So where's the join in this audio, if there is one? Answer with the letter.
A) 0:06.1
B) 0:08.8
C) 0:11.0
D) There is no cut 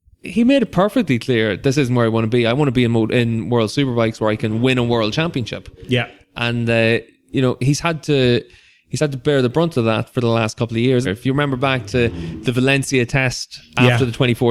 C